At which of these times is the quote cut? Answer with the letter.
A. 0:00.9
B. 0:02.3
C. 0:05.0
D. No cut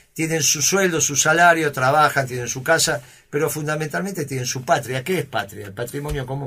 D